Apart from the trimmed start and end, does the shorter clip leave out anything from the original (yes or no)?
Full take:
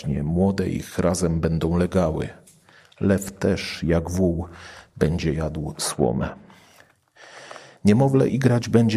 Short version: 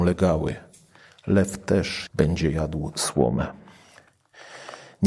yes